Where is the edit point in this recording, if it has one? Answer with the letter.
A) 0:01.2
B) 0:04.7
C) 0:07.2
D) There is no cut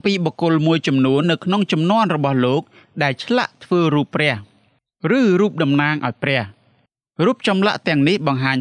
A